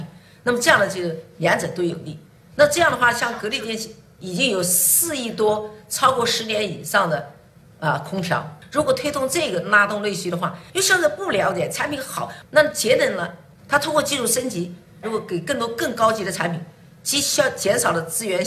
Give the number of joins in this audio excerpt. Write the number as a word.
two